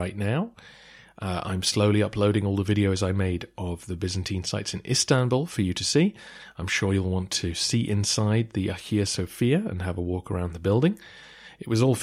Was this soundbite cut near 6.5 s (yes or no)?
no